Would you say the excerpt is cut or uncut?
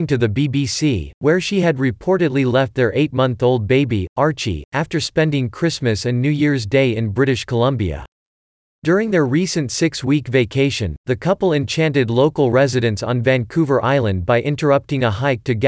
uncut